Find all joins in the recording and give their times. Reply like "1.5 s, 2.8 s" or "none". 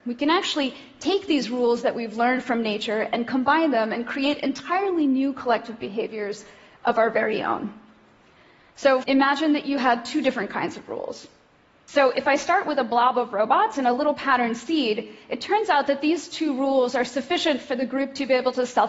9.0 s, 11.9 s